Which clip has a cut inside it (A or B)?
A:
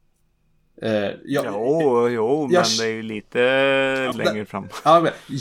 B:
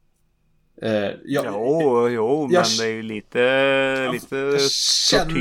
A